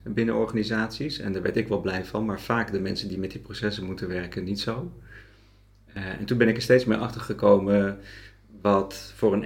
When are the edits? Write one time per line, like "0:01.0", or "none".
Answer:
none